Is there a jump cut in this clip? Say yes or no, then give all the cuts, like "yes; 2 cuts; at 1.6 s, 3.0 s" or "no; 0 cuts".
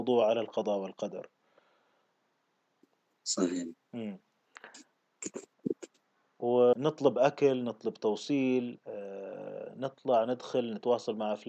yes; 1 cut; at 6.7 s